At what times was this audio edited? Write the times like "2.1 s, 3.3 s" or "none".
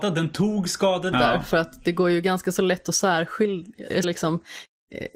1.1 s, 4.0 s